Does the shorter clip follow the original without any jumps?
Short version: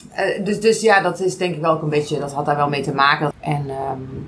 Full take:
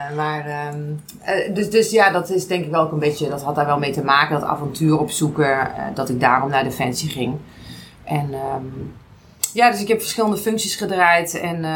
no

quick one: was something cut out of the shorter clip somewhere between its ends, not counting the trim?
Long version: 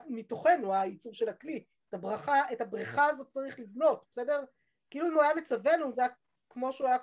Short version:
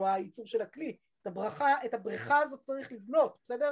no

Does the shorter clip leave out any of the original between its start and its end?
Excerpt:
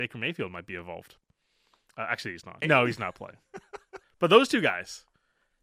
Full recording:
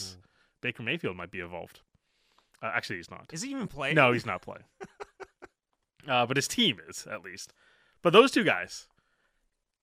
yes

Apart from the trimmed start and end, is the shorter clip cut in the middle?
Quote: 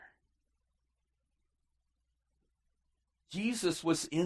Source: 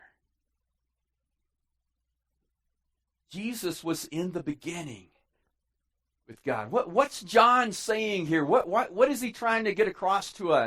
no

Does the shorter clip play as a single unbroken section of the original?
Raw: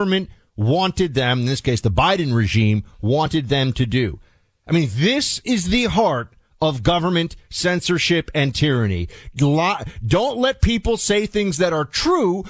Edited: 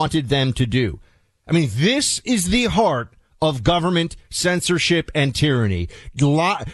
yes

